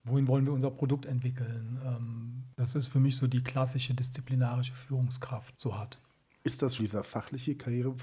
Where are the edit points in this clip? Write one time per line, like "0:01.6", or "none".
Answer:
0:02.5
0:05.5
0:06.8